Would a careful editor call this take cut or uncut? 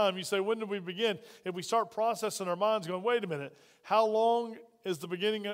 uncut